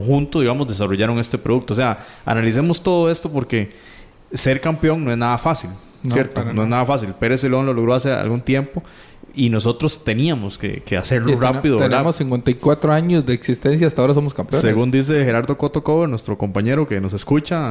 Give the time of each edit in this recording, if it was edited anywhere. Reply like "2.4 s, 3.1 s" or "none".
none

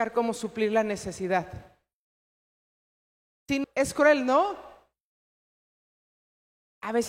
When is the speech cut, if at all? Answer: 3.6 s

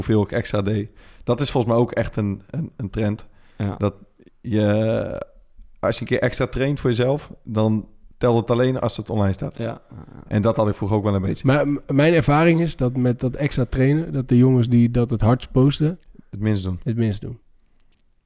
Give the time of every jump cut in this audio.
none

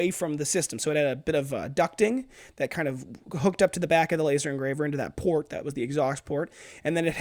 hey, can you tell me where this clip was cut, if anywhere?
none

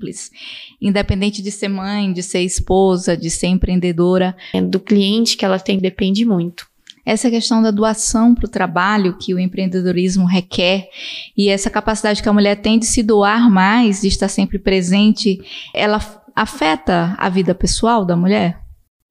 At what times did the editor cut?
4.5 s, 5.8 s, 15.7 s

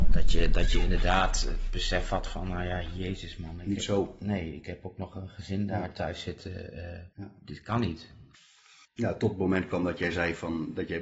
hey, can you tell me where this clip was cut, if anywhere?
7.1 s, 8.8 s

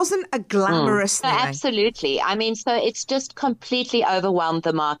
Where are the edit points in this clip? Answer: 1.2 s

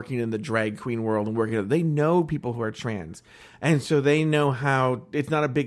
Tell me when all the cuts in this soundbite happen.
none

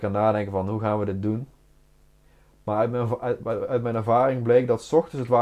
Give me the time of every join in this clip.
none

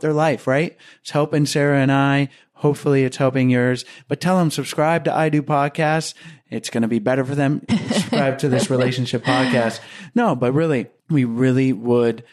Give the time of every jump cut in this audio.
7.7 s

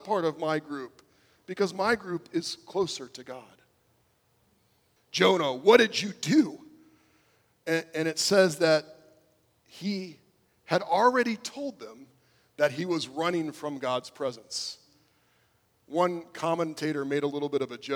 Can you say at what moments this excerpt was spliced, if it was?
5.0 s

